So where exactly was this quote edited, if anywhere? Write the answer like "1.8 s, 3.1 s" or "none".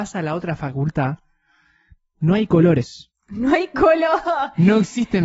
none